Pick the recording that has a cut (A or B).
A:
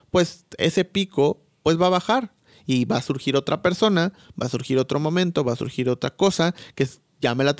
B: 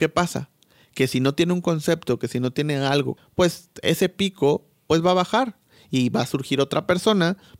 B